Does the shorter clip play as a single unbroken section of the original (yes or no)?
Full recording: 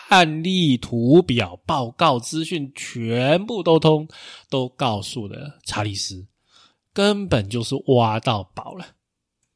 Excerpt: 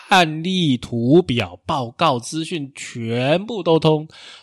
yes